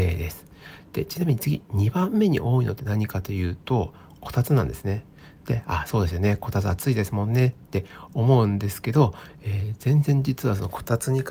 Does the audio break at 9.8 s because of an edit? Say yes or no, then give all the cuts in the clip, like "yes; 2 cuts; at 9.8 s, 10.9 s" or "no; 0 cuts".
no; 0 cuts